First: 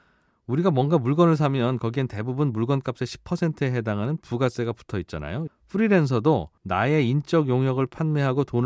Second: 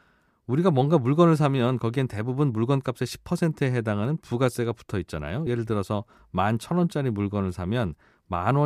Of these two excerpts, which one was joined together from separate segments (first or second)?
first